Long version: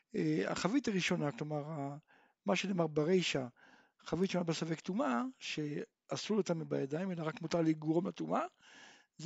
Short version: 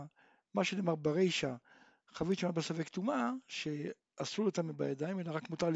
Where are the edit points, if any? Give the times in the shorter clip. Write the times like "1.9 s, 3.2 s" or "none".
none